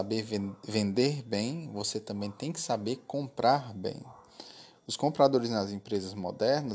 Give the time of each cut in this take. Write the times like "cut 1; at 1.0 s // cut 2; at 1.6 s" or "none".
none